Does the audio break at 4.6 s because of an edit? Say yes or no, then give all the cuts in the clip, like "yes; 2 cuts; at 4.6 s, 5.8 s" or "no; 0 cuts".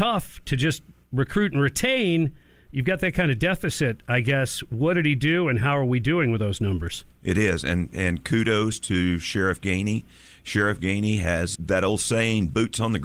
no; 1 cut; at 11.6 s